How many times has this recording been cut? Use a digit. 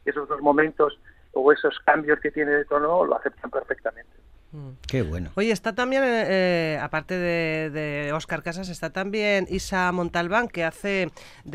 0